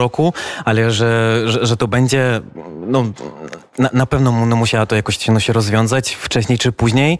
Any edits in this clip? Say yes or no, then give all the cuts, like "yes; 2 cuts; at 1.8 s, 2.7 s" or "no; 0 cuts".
no; 0 cuts